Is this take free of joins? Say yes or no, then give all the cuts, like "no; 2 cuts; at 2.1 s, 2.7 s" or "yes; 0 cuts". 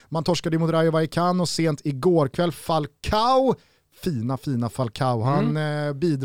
yes; 0 cuts